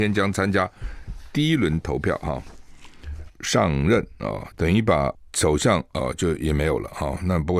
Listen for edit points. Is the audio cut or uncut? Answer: cut